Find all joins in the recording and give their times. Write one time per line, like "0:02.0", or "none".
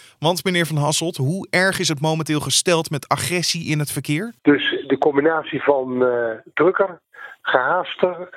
0:04.4